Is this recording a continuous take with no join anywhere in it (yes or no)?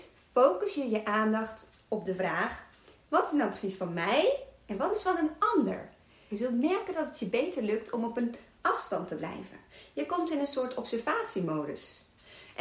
no